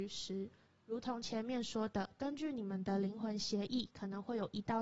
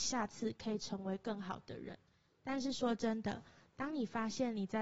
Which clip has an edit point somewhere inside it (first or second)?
second